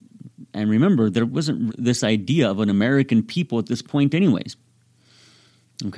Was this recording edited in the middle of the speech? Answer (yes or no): yes